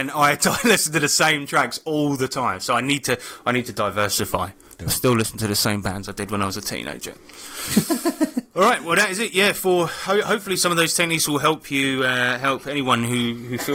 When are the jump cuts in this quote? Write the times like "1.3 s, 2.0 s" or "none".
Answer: none

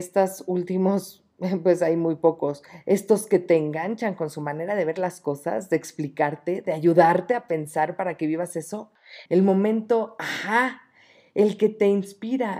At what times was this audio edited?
9.3 s

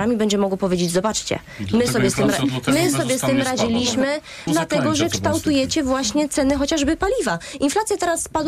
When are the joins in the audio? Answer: 4.5 s

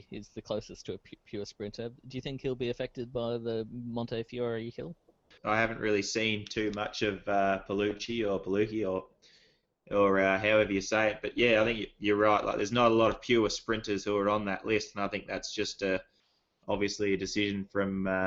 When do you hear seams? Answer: none

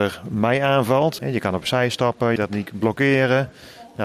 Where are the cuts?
1.2 s, 2.4 s

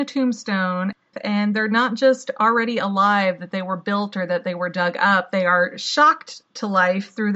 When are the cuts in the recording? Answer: 1.1 s

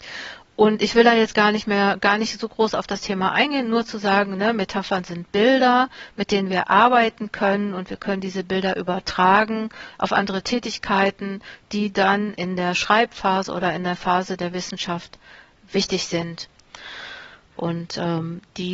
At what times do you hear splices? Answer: 17.5 s

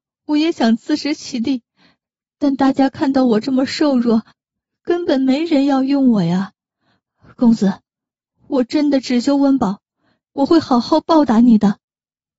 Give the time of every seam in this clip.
10.3 s

